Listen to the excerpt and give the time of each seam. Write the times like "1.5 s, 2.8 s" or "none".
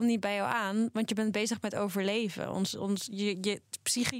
none